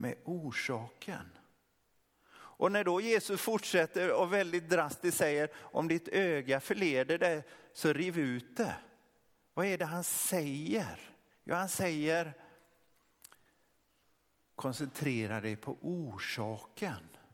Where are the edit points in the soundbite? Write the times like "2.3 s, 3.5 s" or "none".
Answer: none